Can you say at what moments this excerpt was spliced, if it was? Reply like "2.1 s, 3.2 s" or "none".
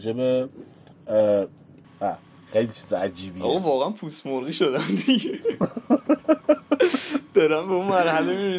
1.8 s

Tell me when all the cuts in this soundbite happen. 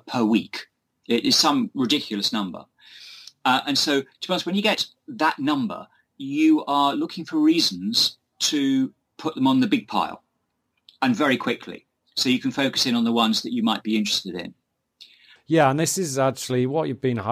15.4 s

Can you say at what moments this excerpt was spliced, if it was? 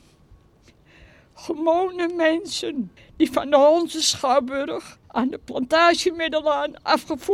3.0 s, 5.0 s

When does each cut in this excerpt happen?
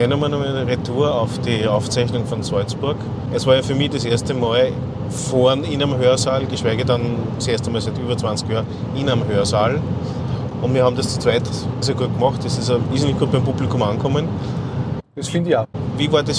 11.8 s

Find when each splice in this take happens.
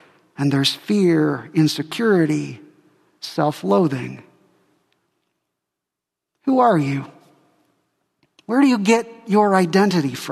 none

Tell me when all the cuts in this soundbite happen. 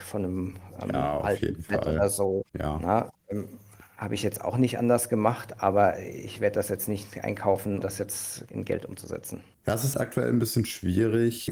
7.8 s, 9.9 s

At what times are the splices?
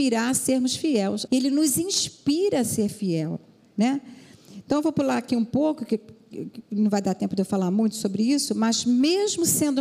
1.3 s

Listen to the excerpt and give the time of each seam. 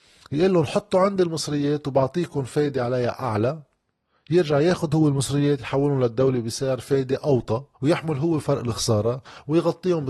7.7 s

